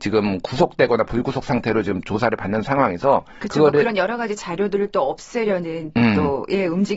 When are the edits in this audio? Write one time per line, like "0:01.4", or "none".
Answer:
none